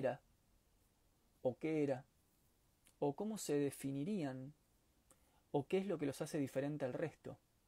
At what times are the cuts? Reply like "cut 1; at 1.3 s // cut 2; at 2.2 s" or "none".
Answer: none